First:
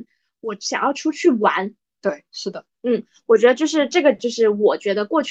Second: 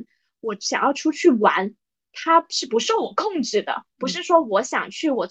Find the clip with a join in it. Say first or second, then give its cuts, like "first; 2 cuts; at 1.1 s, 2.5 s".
first; 1 cut; at 2.0 s